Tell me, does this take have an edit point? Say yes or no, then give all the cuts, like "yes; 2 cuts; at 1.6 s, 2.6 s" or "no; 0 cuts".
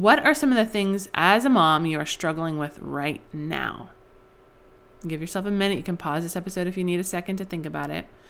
no; 0 cuts